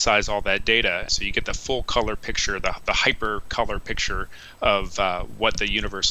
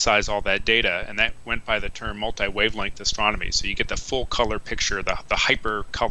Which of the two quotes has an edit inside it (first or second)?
first